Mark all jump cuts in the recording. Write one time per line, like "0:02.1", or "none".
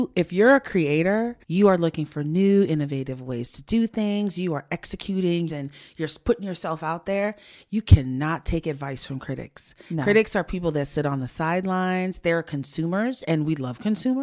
0:01.4
0:05.5